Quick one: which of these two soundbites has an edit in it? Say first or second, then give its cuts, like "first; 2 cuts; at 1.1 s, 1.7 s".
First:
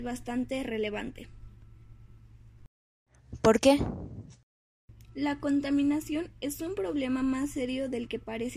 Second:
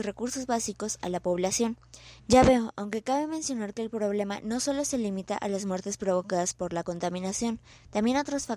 second; 1 cut; at 2.2 s